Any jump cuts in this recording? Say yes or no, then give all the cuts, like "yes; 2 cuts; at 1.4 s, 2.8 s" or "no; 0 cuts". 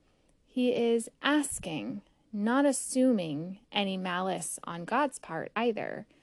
no; 0 cuts